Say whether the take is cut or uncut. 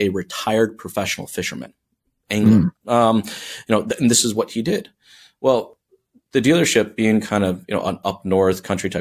cut